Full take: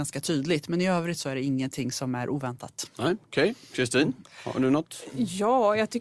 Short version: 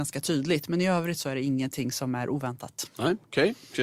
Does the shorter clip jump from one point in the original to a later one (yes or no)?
no